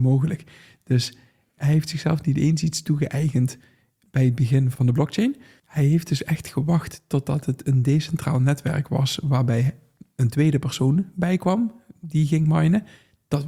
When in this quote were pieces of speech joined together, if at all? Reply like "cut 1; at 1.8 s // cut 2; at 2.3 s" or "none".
cut 1; at 5.6 s